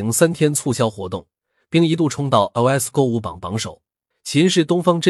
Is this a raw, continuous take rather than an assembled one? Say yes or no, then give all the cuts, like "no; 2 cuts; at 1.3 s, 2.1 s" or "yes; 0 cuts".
no; 1 cut; at 4.1 s